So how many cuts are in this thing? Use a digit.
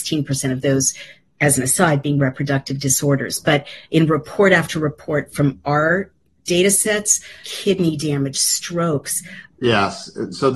2